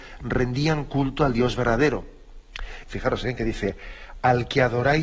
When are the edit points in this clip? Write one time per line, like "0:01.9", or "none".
0:02.8

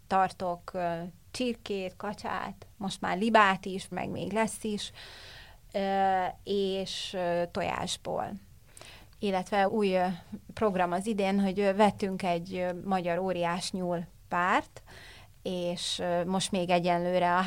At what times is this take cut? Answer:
0:03.9
0:09.7

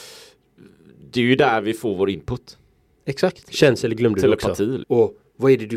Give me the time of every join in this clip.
0:03.4
0:04.8

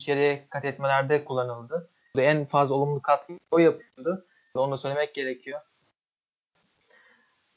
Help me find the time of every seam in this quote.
0:02.1
0:04.6

